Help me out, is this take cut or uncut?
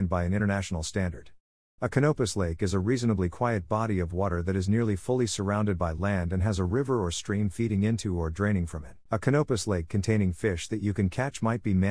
cut